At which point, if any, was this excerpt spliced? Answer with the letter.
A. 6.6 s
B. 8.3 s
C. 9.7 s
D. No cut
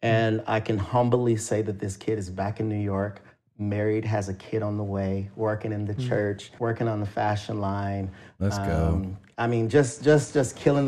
A